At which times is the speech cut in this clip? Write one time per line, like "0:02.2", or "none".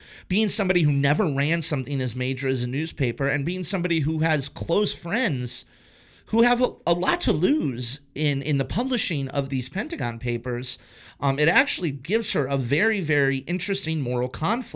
none